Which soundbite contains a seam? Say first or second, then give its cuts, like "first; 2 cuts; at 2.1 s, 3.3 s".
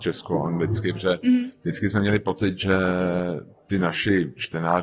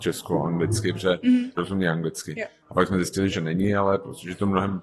second; 2 cuts; at 1.6 s, 3.3 s